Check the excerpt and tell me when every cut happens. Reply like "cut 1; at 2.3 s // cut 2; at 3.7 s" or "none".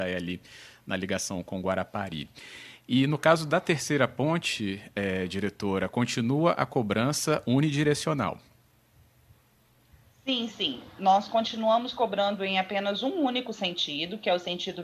none